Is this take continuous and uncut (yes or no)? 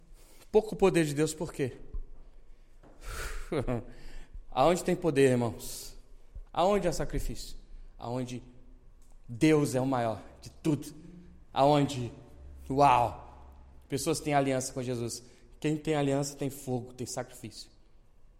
no